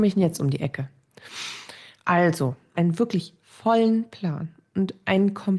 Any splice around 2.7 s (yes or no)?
yes